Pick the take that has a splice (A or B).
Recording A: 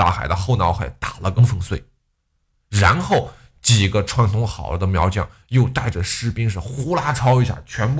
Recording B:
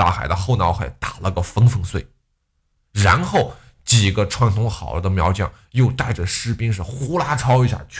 A